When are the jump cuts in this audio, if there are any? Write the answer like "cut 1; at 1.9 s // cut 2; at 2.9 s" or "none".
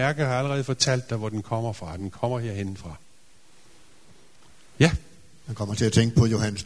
none